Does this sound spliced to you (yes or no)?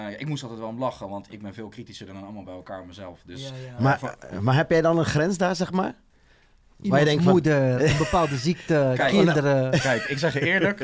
no